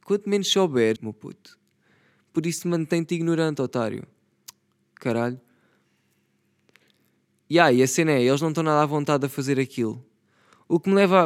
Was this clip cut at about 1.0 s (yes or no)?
yes